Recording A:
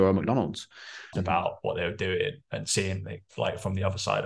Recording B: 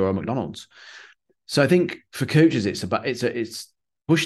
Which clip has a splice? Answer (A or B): A